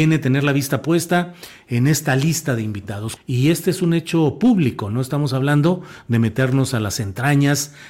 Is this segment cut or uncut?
cut